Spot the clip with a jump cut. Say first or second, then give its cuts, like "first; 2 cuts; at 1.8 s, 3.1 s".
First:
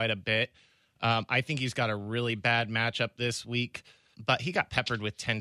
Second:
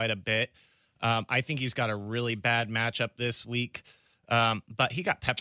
first; 1 cut; at 4.1 s